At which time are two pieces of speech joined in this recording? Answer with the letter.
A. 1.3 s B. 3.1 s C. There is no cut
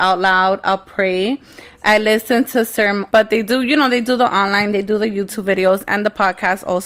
B